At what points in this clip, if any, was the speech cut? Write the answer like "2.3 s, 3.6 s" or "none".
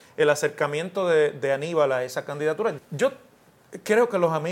2.8 s